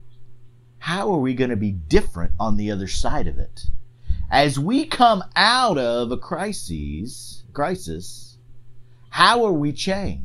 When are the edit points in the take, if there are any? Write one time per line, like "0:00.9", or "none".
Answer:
none